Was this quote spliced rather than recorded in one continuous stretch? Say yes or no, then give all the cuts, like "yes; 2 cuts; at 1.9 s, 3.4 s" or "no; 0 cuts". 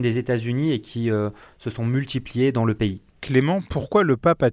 yes; 1 cut; at 3.1 s